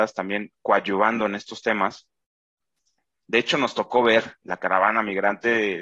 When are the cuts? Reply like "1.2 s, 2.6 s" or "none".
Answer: 3.2 s, 4.4 s